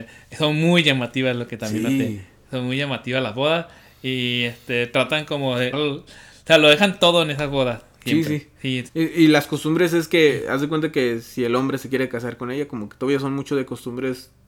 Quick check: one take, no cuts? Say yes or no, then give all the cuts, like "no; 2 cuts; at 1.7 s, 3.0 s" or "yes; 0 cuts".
no; 2 cuts; at 5.7 s, 8.9 s